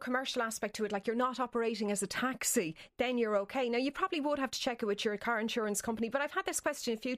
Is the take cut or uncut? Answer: uncut